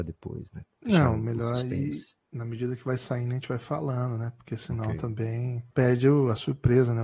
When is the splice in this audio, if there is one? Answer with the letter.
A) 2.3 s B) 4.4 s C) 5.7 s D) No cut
C